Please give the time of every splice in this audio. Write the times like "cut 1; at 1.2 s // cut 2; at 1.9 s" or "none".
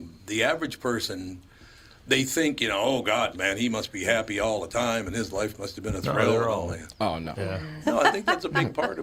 cut 1; at 3.3 s // cut 2; at 7.8 s